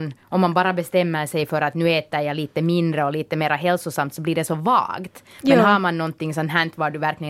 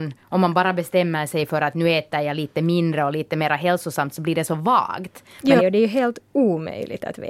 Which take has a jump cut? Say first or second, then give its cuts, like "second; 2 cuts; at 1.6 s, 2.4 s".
second; 1 cut; at 5.6 s